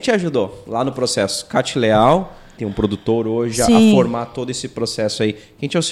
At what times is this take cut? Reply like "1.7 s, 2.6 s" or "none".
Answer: 2.5 s